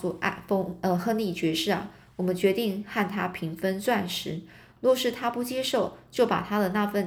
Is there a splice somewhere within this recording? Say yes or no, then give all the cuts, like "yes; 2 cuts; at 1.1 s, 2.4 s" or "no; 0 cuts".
no; 0 cuts